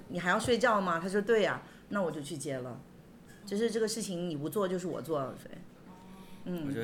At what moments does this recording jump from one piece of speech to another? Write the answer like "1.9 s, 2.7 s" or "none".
3.4 s, 5.4 s

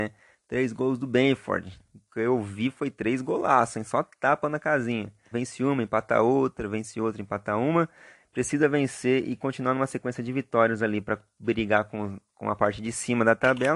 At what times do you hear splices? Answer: 5.3 s

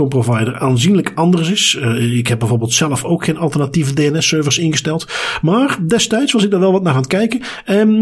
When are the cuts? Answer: none

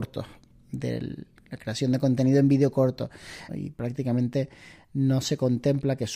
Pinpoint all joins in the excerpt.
3.5 s

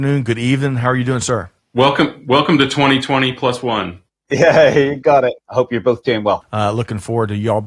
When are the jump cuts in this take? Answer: 5.4 s, 6.4 s

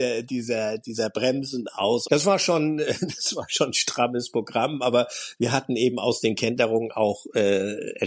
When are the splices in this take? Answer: 2.1 s

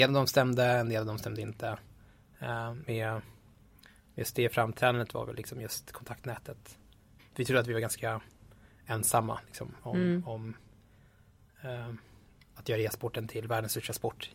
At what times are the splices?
2.8 s, 7.2 s, 12.6 s

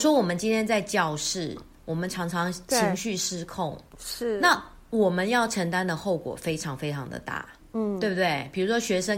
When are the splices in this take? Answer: none

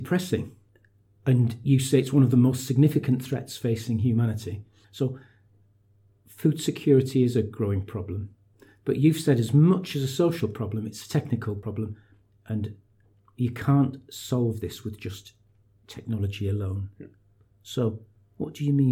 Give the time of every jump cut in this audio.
4.8 s

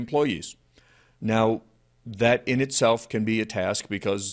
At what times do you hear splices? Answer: 1.1 s

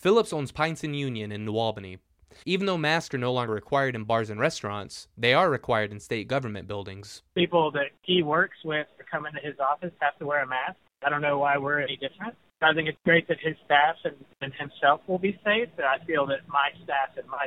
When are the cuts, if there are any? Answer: 2.4 s

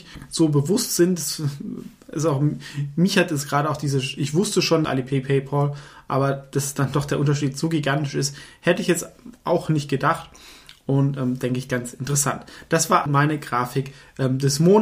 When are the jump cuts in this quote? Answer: 4.8 s, 13.1 s

